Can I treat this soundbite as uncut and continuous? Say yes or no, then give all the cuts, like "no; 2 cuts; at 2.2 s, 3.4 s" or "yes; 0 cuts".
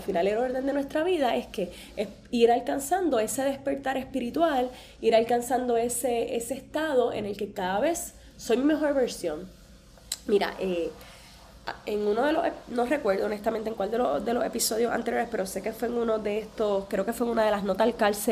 yes; 0 cuts